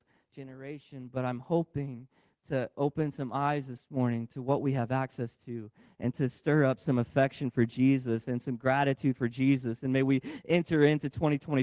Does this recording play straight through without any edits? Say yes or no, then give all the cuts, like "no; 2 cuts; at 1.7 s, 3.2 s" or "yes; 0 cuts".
yes; 0 cuts